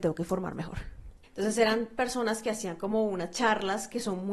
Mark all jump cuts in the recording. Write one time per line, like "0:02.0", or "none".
0:01.2